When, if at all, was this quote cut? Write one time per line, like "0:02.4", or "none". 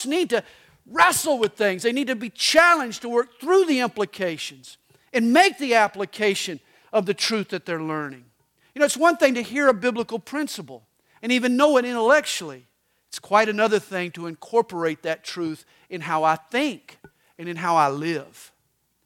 none